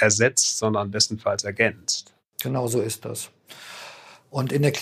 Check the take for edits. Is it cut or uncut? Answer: uncut